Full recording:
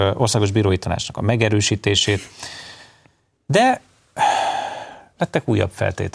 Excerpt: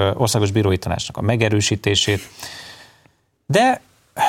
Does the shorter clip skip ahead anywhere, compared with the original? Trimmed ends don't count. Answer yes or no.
no